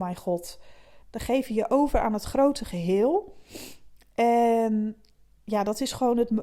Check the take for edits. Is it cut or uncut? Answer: cut